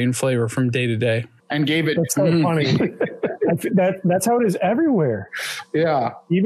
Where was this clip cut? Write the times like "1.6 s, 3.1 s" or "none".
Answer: 1.4 s